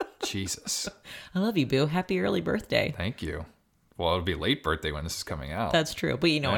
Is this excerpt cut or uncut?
uncut